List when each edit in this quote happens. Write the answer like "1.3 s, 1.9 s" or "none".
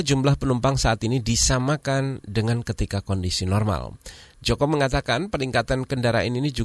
4.3 s